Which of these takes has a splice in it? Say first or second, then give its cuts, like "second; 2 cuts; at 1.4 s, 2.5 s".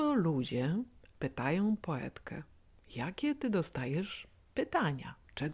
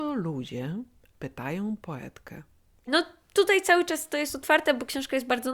second; 1 cut; at 2.9 s